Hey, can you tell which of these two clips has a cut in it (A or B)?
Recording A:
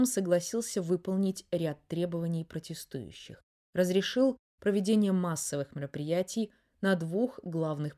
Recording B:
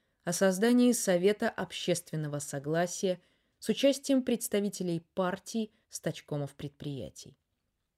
B